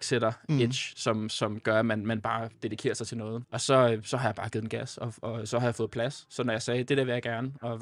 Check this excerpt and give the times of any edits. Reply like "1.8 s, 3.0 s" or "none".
3.4 s